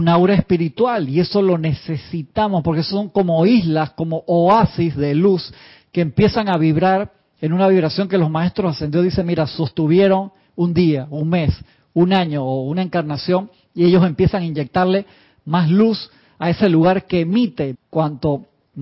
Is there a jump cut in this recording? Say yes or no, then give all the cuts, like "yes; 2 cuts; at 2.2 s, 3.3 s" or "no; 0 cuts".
yes; 1 cut; at 17.7 s